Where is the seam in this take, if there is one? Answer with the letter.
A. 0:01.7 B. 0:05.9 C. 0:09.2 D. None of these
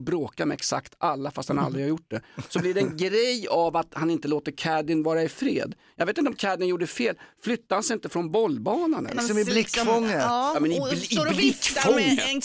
C